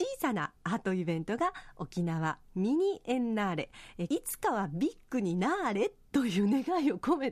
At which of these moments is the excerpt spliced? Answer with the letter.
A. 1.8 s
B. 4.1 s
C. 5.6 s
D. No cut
B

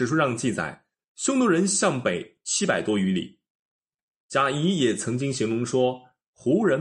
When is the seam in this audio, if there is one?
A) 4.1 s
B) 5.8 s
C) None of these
A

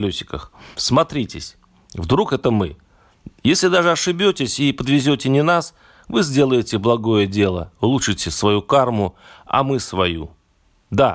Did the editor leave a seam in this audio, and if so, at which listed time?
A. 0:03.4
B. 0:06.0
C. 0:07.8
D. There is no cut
D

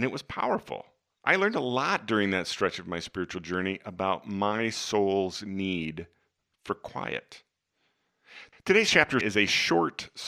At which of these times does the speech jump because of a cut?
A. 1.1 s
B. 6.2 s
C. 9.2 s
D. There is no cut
C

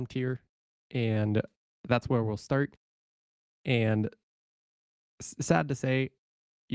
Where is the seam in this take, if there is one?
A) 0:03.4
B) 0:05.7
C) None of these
A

